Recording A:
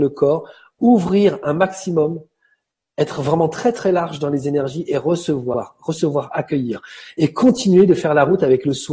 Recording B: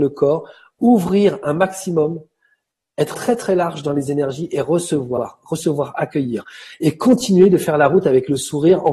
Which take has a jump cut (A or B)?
B